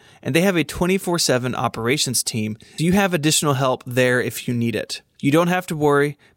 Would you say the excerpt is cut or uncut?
cut